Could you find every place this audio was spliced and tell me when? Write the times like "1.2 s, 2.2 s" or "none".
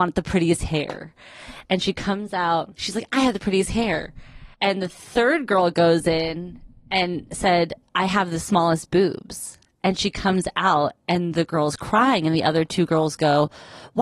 4.5 s